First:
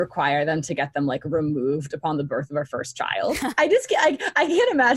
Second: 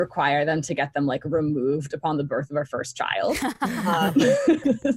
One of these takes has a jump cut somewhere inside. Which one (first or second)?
first